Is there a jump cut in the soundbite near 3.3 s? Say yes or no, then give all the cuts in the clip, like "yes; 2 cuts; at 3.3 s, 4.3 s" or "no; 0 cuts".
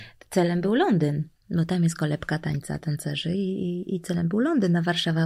no; 0 cuts